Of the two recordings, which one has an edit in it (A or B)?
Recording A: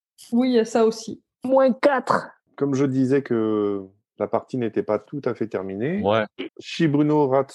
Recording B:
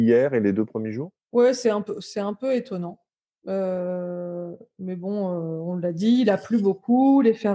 A